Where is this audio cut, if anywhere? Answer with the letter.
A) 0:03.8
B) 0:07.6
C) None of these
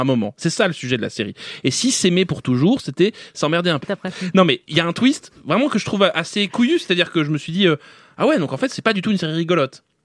A